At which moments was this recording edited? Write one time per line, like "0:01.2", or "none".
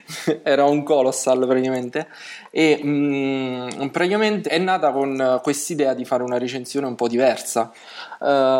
0:04.5